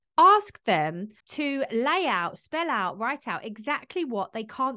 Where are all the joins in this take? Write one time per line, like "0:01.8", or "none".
none